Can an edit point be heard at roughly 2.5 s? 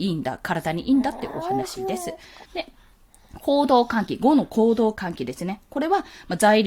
yes; 1 cut; at 2.5 s

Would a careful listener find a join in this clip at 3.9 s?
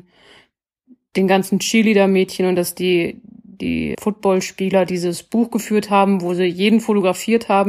yes; 1 cut; at 3.9 s

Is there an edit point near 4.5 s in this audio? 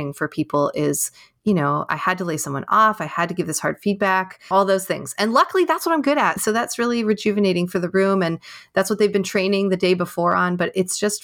yes; 1 cut; at 4.5 s

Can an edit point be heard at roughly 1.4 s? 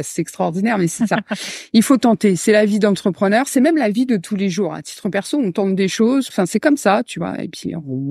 no; 1 cut; at 6.3 s

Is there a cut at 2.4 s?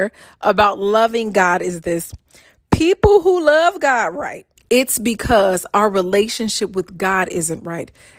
no; 1 cut; at 4.6 s

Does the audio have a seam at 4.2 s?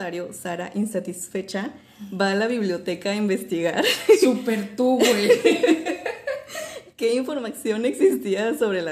no; 0 cuts

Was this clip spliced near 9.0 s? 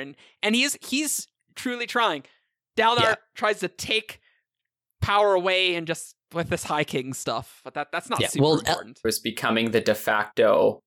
yes; 1 cut; at 9.0 s

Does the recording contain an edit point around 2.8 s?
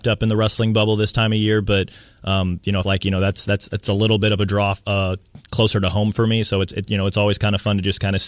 yes; 1 cut; at 2.8 s

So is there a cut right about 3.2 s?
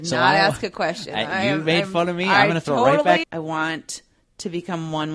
yes; 1 cut; at 3.2 s

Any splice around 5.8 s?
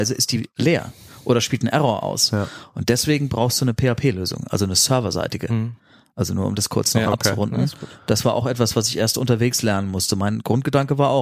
no; 0 cuts

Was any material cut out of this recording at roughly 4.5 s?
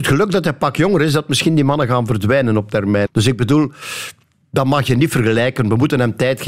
no; 1 cut; at 3.0 s

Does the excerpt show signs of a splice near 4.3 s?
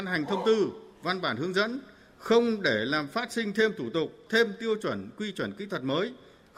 yes; 1 cut; at 4.3 s

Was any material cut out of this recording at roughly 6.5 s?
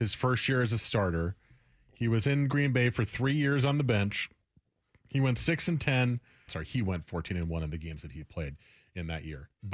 yes; 1 cut; at 6.5 s

